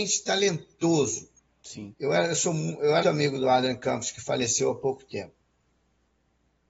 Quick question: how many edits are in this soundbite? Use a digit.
2